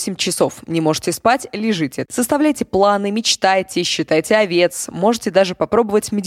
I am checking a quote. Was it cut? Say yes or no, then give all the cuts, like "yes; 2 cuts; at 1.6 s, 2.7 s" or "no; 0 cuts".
yes; 1 cut; at 2.1 s